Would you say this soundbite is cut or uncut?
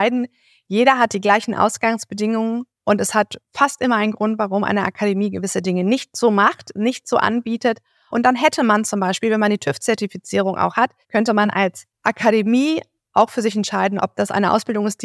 cut